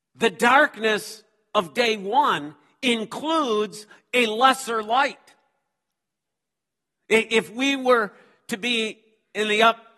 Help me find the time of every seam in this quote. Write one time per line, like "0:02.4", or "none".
0:06.9